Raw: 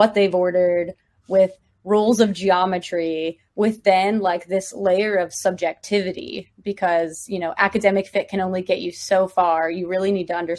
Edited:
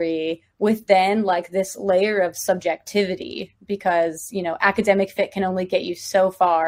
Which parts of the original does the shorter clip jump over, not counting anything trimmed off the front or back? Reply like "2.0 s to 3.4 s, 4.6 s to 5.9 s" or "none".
none